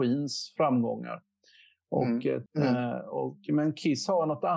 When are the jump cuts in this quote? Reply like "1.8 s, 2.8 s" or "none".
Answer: 2.5 s